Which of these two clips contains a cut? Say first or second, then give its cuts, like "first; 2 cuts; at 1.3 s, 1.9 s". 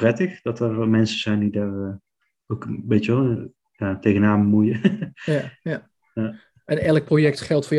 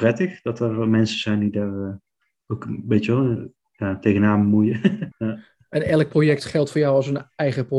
second; 1 cut; at 5.1 s